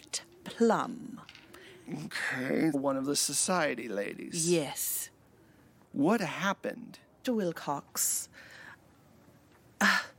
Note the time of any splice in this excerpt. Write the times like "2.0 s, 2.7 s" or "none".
2.7 s, 5.8 s, 7.2 s